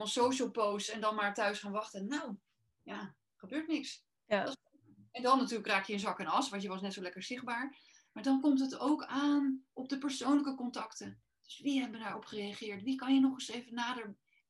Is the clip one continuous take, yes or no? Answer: yes